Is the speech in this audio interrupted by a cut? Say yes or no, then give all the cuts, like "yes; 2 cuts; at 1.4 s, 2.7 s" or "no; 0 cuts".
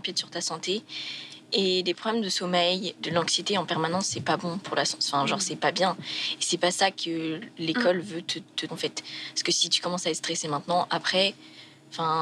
yes; 2 cuts; at 3.0 s, 8.7 s